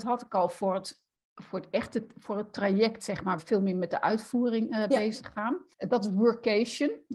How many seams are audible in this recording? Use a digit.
2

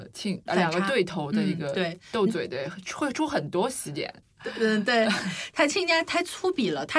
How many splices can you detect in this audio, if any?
1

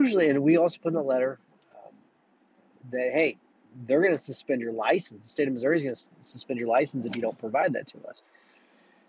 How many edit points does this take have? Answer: 0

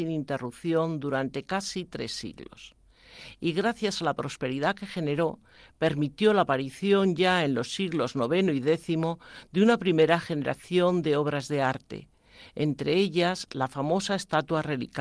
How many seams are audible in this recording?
0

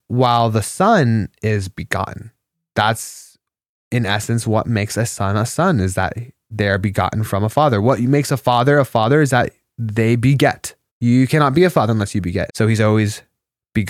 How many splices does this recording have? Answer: 2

